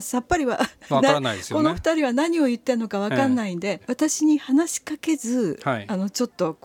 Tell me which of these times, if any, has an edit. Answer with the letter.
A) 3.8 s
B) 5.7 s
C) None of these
A